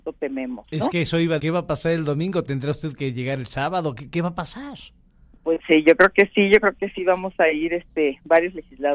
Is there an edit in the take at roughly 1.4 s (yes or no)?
yes